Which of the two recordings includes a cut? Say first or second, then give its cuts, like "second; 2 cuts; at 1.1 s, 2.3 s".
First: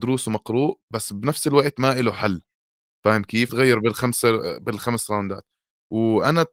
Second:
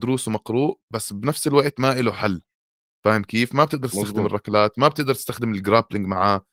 first; 1 cut; at 3.5 s